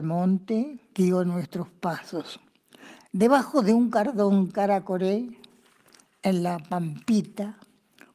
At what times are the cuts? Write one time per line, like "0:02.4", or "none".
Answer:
0:03.0